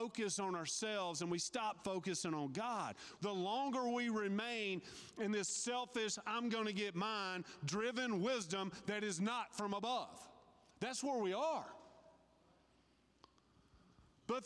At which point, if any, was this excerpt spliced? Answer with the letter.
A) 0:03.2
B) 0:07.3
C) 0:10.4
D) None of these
A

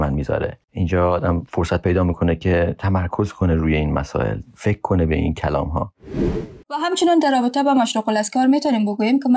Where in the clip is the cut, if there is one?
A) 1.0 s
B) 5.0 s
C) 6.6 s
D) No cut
C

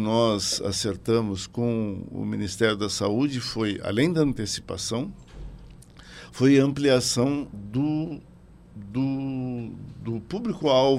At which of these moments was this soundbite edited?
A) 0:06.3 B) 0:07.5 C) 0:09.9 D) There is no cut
B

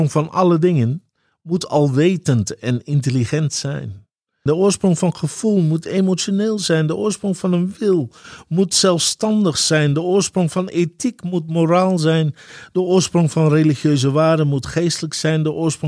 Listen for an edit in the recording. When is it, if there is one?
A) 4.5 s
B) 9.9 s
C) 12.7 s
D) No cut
A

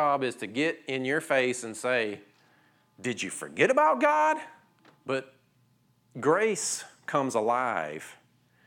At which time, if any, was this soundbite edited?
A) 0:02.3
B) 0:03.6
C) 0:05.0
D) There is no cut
C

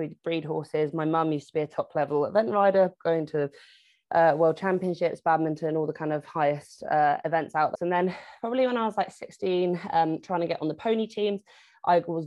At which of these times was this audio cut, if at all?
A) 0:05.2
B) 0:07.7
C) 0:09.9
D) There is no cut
B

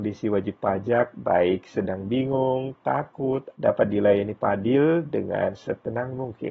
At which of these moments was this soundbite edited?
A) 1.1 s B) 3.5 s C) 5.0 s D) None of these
B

